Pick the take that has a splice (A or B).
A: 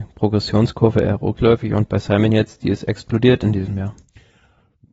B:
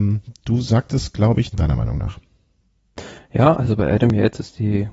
B